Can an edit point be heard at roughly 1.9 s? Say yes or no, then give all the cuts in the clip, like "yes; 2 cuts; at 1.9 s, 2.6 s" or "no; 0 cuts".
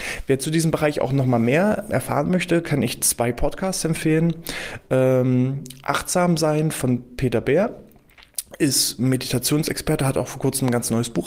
yes; 1 cut; at 1.9 s